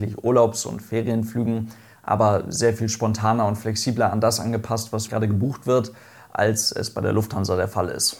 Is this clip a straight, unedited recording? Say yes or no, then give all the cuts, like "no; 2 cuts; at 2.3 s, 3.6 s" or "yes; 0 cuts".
no; 1 cut; at 5.1 s